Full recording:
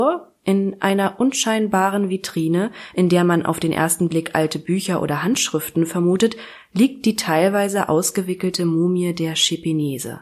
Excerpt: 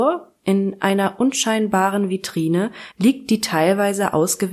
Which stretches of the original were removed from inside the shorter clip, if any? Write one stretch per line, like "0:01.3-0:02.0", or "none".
0:02.9-0:06.7

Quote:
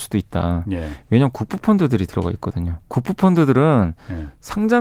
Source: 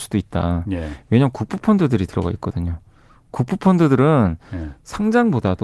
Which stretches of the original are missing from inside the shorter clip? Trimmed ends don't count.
0:02.8-0:03.3

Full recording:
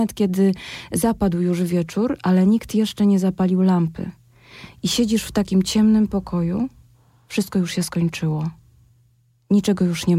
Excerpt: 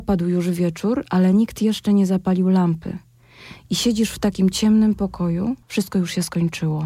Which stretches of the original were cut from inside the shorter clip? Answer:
0:06.8-0:07.2

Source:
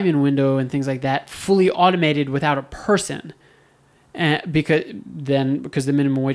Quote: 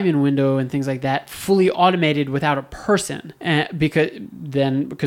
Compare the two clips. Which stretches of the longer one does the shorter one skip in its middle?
0:03.4-0:04.1

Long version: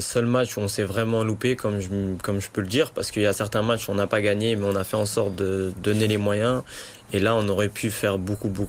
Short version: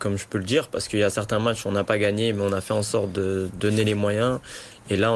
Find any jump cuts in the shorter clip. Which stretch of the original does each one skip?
none

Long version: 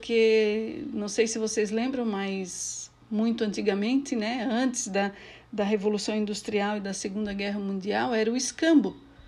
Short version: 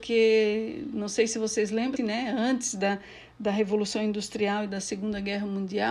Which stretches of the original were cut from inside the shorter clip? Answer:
0:02.0-0:04.1

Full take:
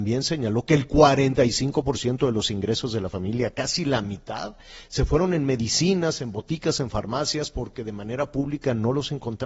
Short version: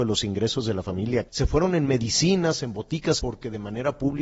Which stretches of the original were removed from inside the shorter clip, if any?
0:03.5-0:04.9
0:06.8-0:07.5

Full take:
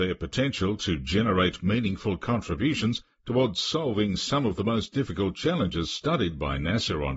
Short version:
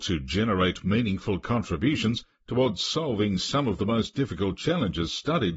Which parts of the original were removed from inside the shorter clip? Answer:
none

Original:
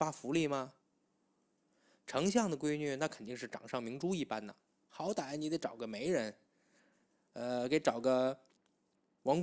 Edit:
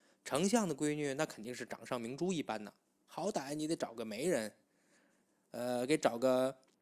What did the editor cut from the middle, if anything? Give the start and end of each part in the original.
none

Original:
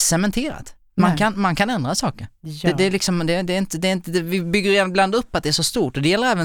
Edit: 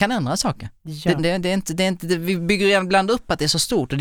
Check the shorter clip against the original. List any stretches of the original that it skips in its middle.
0:02.8-0:03.2

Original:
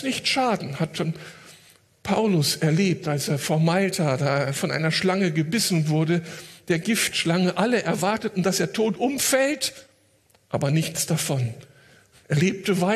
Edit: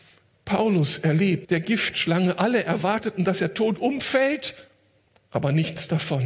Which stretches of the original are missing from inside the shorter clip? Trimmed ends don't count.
0:03.0-0:06.6

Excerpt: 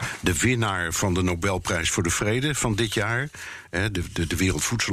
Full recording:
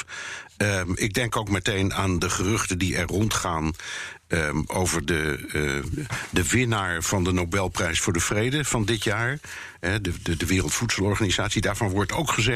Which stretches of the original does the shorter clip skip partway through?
none

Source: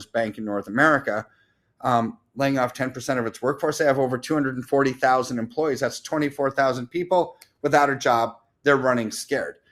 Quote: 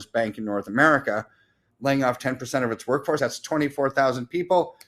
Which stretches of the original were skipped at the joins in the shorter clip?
0:01.7-0:02.2
0:03.7-0:05.8

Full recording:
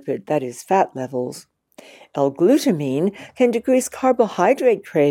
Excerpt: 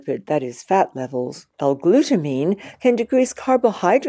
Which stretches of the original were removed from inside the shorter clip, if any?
0:01.5-0:02.1

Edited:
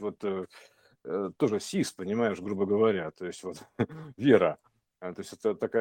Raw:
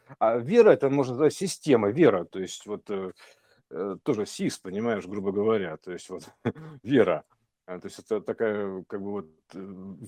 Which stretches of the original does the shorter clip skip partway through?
none

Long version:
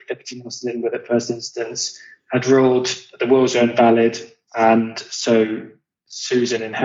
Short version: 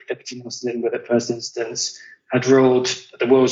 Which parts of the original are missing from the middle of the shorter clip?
none

